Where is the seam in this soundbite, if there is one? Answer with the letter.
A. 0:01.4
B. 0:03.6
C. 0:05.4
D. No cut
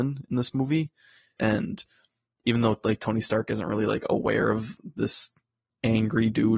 A